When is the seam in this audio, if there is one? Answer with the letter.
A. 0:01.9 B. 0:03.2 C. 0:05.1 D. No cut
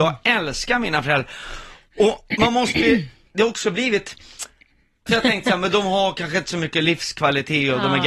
C